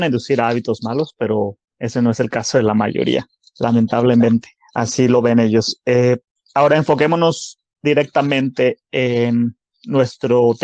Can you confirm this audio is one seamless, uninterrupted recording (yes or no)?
yes